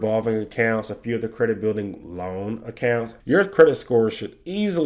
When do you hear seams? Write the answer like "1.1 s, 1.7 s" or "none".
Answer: 3.2 s